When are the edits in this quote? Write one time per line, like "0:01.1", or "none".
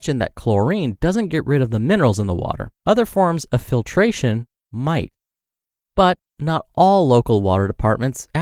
0:02.8
0:05.8